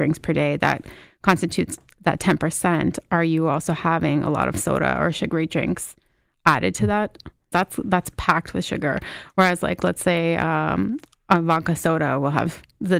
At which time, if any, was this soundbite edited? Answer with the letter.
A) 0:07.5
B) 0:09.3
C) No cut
A